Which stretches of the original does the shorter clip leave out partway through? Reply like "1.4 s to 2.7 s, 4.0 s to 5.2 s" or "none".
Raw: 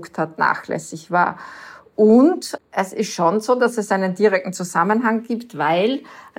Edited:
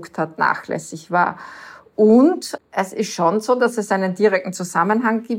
none